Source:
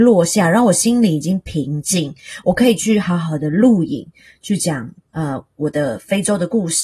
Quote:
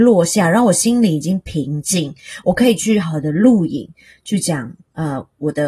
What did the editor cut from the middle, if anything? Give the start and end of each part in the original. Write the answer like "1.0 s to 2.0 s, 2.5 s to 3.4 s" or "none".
3.0 s to 3.2 s